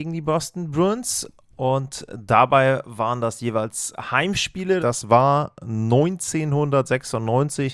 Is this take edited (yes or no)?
yes